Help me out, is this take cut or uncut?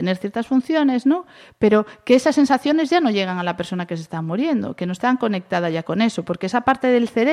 uncut